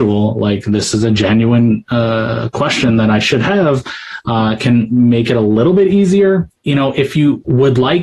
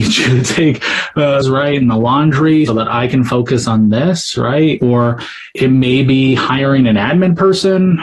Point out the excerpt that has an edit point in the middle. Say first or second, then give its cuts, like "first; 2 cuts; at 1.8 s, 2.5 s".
second; 2 cuts; at 1.4 s, 2.7 s